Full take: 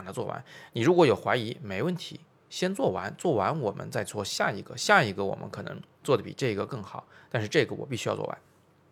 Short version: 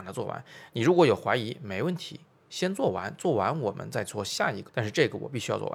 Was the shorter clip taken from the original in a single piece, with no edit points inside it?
no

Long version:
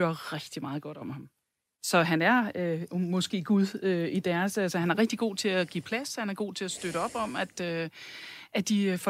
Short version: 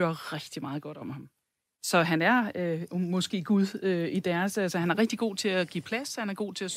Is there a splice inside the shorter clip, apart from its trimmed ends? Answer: no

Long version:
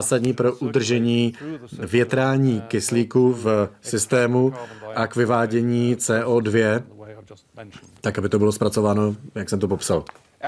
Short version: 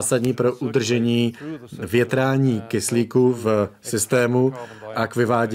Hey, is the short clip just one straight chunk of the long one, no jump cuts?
yes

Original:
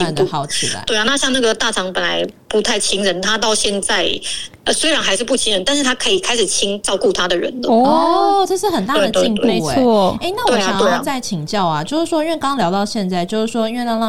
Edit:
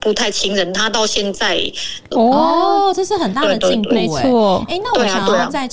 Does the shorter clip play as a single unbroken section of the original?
no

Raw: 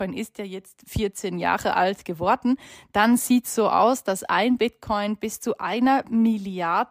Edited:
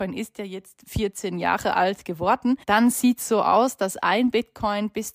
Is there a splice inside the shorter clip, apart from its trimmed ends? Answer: yes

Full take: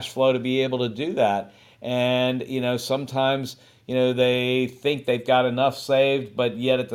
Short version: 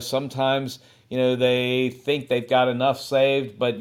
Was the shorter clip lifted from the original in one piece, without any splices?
yes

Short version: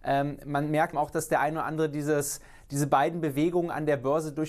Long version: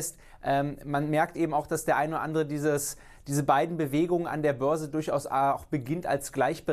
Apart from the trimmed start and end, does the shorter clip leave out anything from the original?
yes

